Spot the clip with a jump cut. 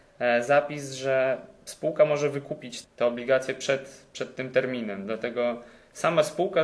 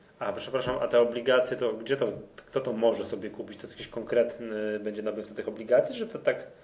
first; 1 cut; at 2.8 s

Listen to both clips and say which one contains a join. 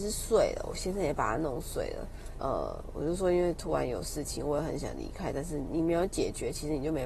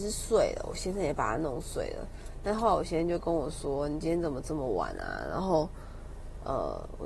first; 1 cut; at 2.4 s

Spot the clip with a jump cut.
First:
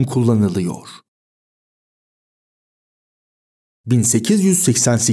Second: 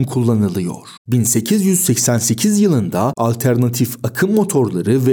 second; 1 cut; at 1.0 s

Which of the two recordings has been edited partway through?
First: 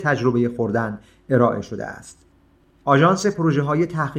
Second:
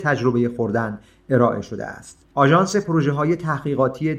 second; 1 cut; at 2.2 s

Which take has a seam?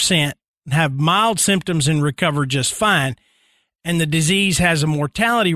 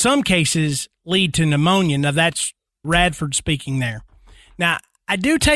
second; 1 cut; at 2.8 s

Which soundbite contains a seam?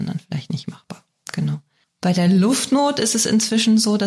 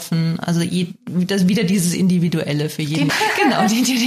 second; 1 cut; at 3.1 s

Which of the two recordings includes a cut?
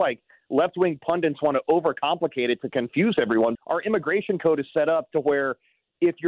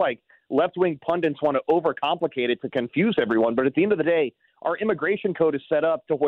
first; 1 cut; at 3.6 s

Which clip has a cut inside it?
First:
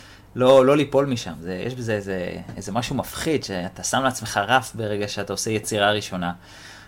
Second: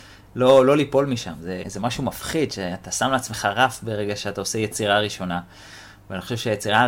second; 1 cut; at 1.6 s

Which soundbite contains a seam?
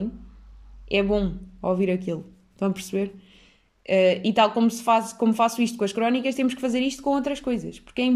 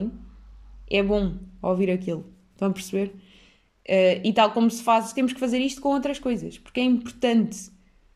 second; 1 cut; at 5.2 s

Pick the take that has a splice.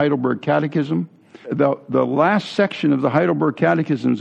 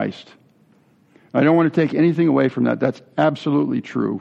first; 1 cut; at 1.4 s

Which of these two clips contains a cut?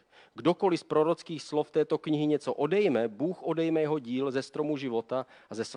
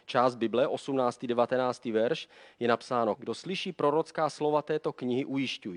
second; 1 cut; at 3.2 s

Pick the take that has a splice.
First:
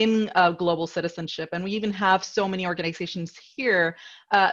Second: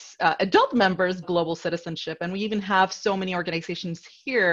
second; 1 cut; at 1.2 s

